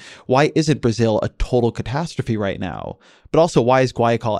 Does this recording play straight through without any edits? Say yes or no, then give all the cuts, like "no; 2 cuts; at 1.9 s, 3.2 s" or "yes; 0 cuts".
yes; 0 cuts